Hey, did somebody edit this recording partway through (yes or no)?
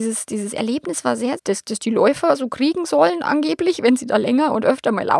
yes